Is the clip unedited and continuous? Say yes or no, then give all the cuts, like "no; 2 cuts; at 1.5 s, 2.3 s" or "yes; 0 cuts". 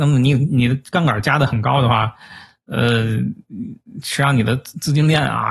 yes; 0 cuts